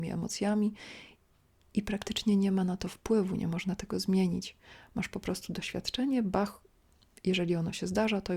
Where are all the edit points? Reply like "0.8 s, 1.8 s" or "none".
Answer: none

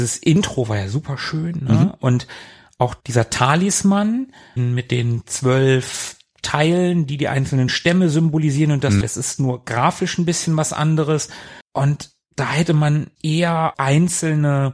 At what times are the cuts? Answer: 9.0 s, 11.6 s

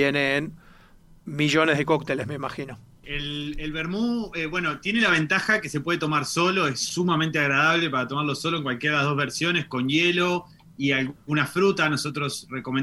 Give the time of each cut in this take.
3.0 s

